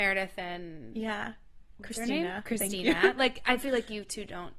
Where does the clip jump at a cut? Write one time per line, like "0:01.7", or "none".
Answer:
none